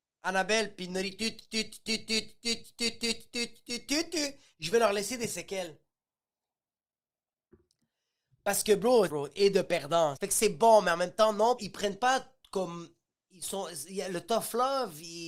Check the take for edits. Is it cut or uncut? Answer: cut